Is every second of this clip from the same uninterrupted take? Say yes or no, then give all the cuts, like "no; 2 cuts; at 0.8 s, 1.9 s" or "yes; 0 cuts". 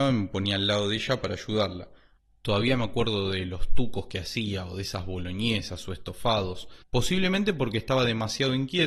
no; 1 cut; at 6.8 s